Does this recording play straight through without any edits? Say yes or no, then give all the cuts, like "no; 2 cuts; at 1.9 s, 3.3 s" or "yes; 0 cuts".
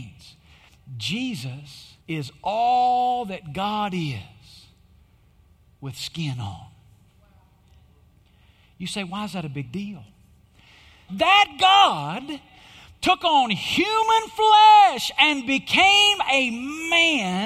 no; 2 cuts; at 2.0 s, 11.1 s